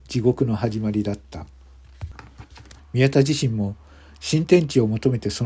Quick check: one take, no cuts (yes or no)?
no